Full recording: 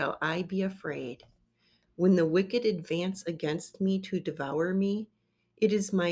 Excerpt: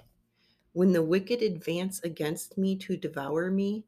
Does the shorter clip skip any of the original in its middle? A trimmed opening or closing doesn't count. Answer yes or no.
no